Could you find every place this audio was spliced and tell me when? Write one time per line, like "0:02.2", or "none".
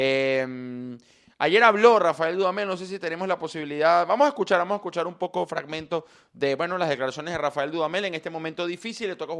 none

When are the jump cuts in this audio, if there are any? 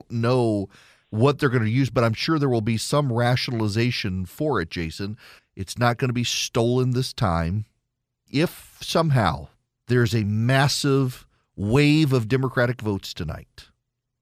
0:05.4
0:08.3
0:09.8

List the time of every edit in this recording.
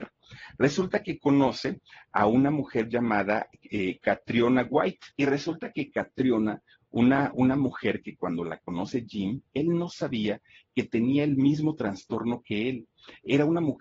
0:05.1

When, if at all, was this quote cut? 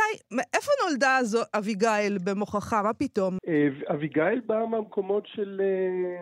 0:03.4

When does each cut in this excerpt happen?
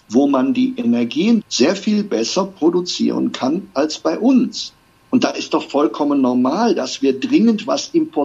0:01.4
0:05.0

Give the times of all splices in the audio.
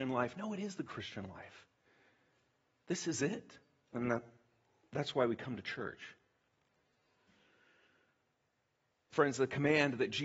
0:03.9
0:08.9

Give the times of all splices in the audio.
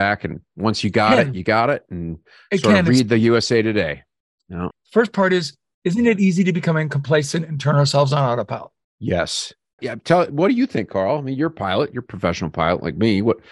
0:04.7
0:09.8

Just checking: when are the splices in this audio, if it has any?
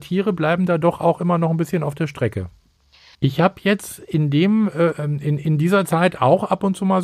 0:03.1

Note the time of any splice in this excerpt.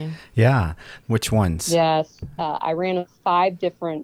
0:01.0
0:02.4

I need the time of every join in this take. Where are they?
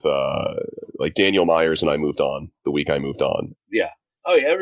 0:03.5

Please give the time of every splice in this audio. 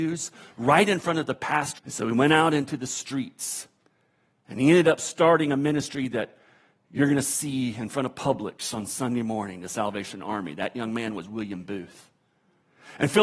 0:01.8

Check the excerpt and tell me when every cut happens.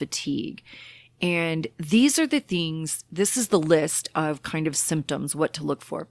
none

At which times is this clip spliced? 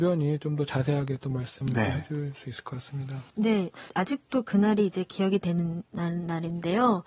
0:03.9

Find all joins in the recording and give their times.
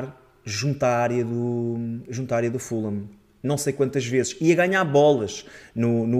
none

